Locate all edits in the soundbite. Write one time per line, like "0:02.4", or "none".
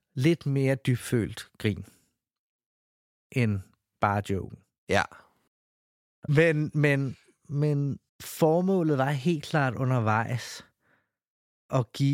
0:06.3
0:08.1